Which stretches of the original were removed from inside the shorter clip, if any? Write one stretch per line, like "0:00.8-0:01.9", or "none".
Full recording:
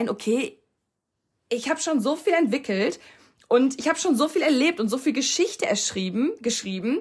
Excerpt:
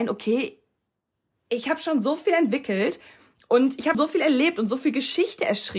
0:03.9-0:04.2